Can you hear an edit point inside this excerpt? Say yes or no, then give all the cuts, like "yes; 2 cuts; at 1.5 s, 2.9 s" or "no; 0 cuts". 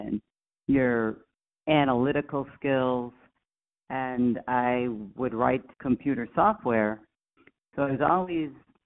yes; 1 cut; at 5.7 s